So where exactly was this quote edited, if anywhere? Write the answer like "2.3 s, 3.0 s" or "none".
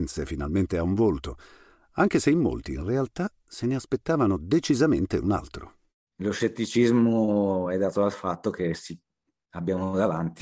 6.1 s